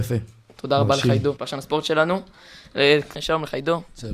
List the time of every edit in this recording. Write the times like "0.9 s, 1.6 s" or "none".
1.4 s, 3.1 s